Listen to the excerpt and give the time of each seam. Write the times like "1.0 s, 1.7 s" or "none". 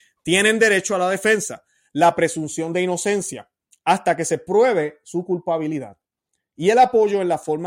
none